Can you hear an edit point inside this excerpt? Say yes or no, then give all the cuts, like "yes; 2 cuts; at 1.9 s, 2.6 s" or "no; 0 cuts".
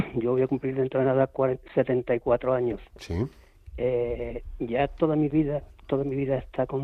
no; 0 cuts